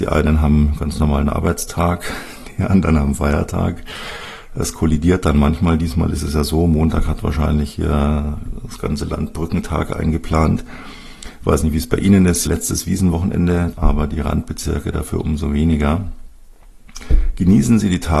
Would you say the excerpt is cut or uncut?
cut